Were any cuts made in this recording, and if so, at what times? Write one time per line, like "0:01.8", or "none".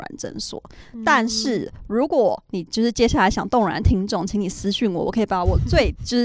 none